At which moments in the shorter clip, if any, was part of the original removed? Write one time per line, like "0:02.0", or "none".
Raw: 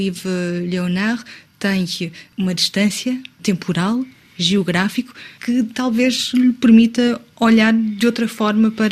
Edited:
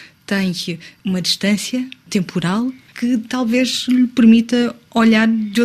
0:02.9